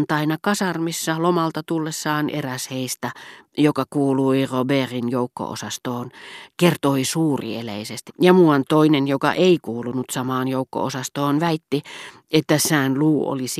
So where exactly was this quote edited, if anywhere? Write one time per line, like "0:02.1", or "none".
0:08.1